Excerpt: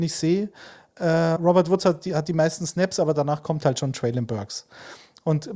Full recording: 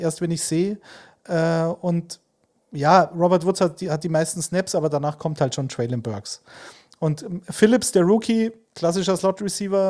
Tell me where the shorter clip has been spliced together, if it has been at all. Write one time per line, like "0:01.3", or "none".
0:01.4